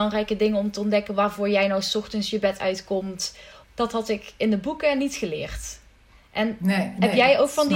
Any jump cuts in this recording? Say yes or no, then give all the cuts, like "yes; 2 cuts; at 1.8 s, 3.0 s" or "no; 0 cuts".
yes; 1 cut; at 3.6 s